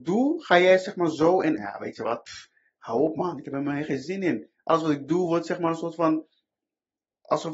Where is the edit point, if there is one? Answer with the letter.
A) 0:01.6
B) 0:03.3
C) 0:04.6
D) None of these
A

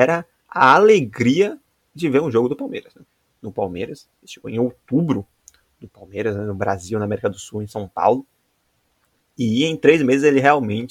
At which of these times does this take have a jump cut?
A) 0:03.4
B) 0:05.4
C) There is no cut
A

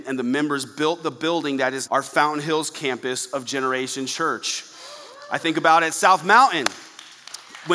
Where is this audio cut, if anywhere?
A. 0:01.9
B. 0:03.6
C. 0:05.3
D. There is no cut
A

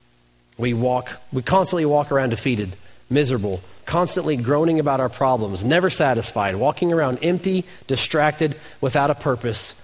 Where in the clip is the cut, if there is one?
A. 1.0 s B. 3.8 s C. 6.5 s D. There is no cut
B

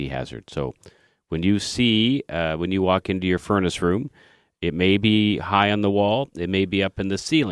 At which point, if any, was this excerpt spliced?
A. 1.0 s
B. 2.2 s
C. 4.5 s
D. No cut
D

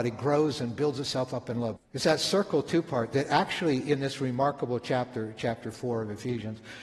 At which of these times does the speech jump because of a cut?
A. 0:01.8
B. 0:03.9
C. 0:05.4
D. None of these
A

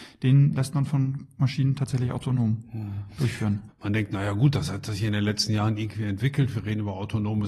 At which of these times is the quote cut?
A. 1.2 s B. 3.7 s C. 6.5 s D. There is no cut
B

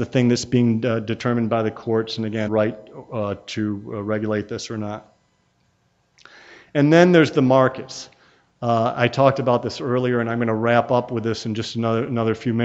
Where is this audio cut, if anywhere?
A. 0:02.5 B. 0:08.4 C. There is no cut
A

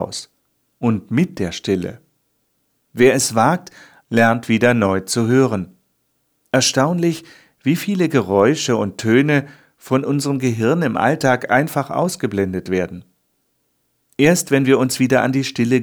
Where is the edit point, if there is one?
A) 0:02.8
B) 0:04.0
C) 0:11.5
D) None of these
B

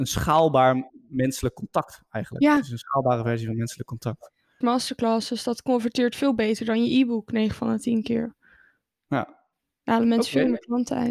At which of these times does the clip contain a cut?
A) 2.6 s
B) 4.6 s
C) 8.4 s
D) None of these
B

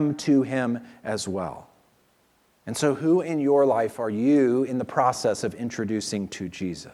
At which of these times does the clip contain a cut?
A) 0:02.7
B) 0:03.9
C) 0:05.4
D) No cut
D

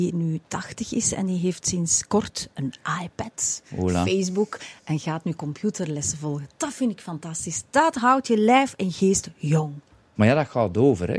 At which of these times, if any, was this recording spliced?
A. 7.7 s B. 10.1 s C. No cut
B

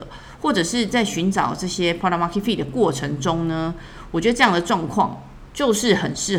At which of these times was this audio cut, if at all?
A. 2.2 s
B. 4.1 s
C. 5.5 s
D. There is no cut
D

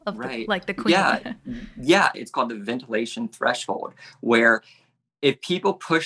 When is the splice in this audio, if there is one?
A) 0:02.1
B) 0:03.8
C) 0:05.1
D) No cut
A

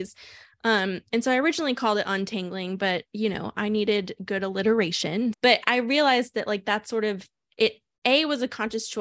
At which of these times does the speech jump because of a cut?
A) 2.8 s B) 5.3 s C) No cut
B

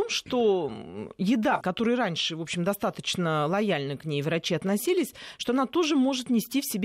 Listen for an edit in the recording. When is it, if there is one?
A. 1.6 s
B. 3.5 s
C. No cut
A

